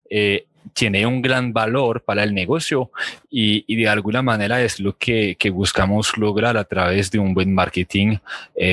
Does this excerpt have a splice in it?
no; 0 cuts

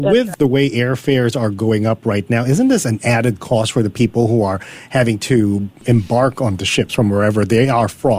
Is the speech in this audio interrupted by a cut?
no; 0 cuts

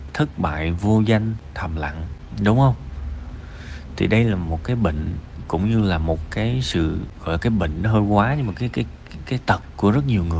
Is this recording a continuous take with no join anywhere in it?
yes; 0 cuts

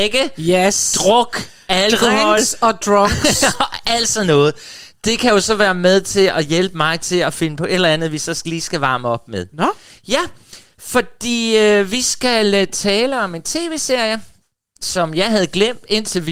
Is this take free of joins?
yes; 0 cuts

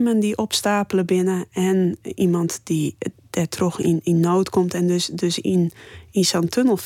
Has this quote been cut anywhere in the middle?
no; 0 cuts

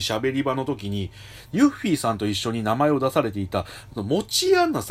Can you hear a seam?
yes; 2 cuts; at 1.4 s, 3.9 s

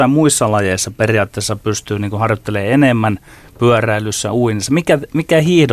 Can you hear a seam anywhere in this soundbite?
no; 0 cuts

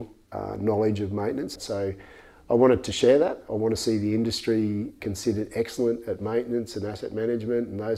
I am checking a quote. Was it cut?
yes; 1 cut; at 1.6 s

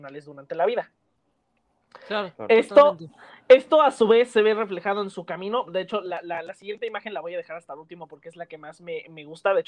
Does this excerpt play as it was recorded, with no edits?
yes; 0 cuts

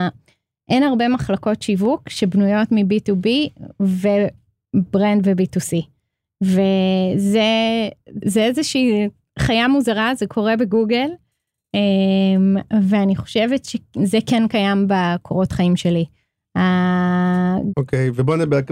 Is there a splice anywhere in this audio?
yes; 2 cuts; at 8.2 s, 17.7 s

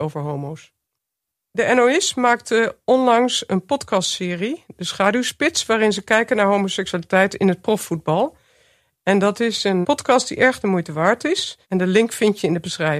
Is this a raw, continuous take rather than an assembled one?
no; 2 cuts; at 9.8 s, 11.6 s

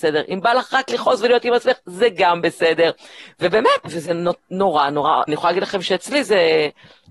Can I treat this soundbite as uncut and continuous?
no; 2 cuts; at 3.8 s, 5.3 s

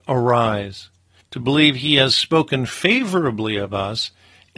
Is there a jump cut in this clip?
yes; 1 cut; at 1.2 s

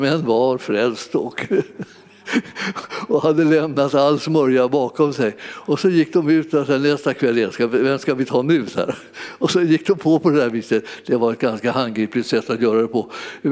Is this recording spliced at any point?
no; 0 cuts

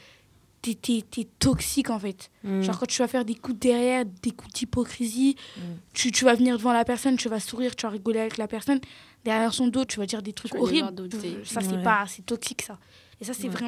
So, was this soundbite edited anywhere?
yes; 2 cuts; at 9.9 s, 11.1 s

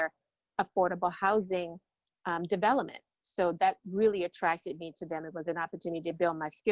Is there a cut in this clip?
no; 0 cuts

